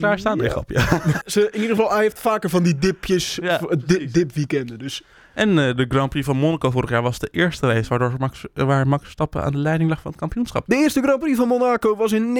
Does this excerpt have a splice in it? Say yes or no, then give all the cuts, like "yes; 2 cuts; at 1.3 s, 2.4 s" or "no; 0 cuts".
yes; 2 cuts; at 1.2 s, 10.7 s